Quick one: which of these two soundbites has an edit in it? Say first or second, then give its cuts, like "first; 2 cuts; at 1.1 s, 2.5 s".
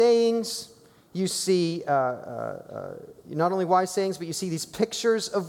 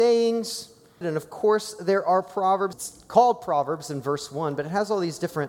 second; 2 cuts; at 1.0 s, 2.7 s